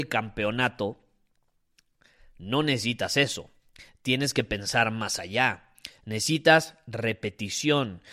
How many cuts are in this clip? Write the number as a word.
zero